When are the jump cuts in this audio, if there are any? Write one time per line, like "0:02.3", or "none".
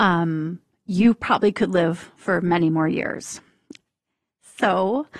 0:03.8